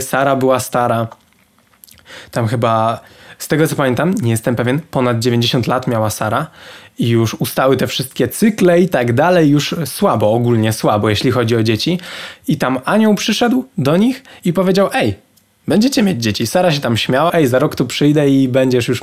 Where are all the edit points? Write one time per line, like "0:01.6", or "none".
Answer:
0:17.3